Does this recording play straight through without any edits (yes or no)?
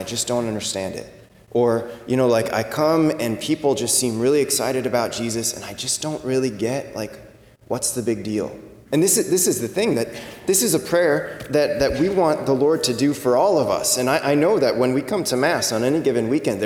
no